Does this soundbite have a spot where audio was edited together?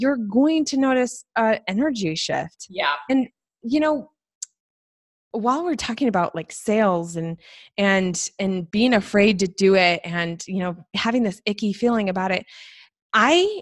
no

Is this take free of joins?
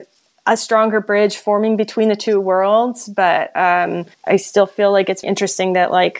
no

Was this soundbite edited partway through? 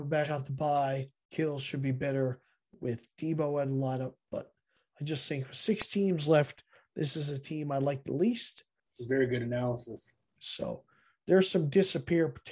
yes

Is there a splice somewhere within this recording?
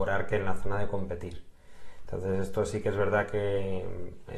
no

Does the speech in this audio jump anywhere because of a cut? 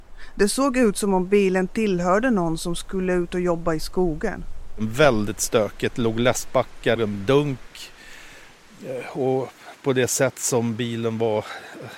yes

